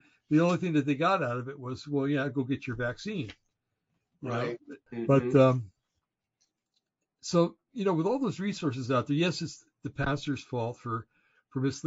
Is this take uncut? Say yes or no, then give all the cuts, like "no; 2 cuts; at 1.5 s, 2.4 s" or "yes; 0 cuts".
no; 1 cut; at 4.9 s